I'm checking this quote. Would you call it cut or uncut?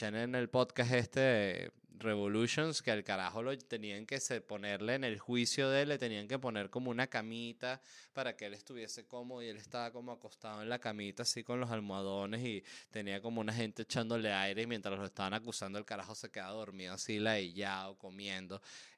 uncut